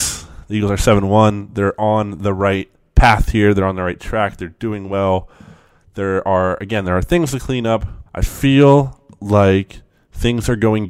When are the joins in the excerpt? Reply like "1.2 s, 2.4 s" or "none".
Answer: 8.1 s